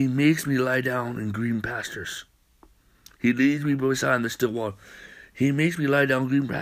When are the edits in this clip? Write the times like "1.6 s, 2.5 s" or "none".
none